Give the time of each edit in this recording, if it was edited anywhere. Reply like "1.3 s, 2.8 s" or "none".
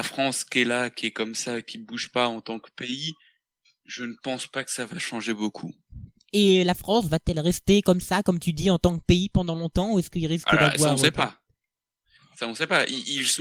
none